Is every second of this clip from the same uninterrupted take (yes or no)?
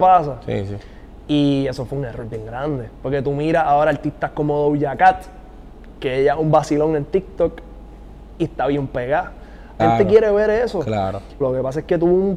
no